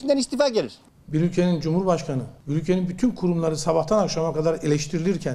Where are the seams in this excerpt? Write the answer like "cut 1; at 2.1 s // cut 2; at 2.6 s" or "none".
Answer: none